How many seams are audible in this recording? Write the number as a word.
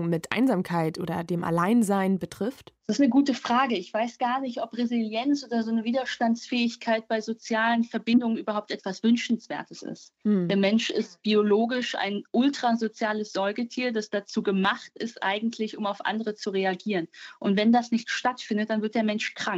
zero